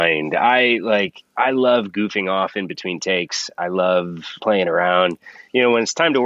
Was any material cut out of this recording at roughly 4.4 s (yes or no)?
yes